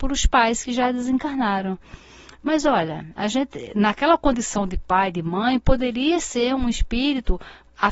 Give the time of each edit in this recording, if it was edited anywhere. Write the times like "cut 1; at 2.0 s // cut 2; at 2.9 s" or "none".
cut 1; at 3.2 s